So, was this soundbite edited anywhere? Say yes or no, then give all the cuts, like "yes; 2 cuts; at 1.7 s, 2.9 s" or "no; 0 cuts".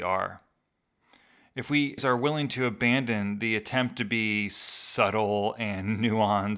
yes; 1 cut; at 2.0 s